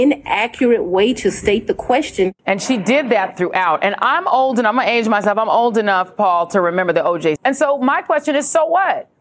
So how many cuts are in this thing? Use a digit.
2